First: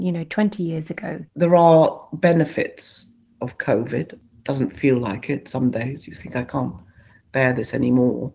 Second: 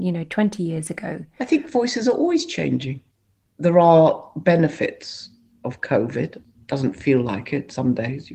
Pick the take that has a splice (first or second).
first